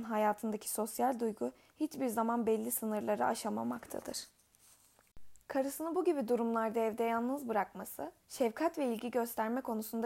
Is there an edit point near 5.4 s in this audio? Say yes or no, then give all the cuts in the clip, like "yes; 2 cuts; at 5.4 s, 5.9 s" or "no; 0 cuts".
yes; 2 cuts; at 5.4 s, 8.2 s